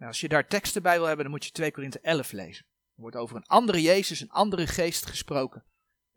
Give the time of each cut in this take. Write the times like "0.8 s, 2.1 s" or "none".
none